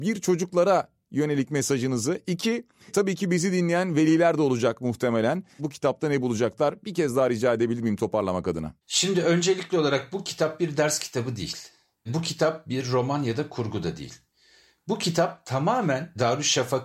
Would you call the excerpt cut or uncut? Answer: cut